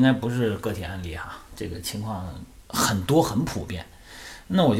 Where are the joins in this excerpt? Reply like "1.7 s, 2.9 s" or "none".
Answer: none